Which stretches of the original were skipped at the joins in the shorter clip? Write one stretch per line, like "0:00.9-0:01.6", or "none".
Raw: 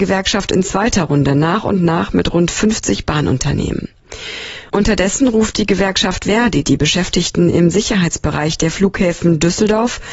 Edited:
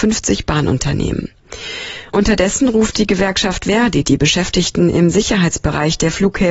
none